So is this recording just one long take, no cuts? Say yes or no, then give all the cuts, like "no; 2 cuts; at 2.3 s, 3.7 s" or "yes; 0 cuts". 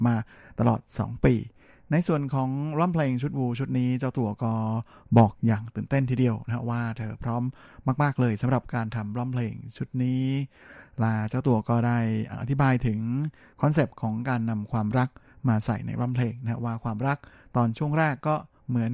yes; 0 cuts